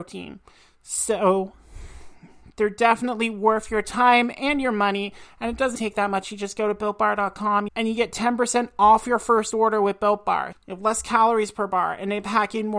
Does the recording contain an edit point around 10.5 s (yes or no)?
yes